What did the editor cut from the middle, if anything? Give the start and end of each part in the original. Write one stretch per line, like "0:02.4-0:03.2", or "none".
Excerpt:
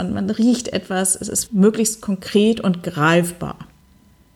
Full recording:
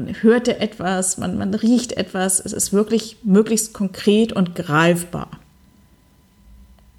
0:02.7-0:03.2